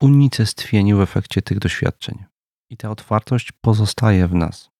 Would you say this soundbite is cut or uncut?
uncut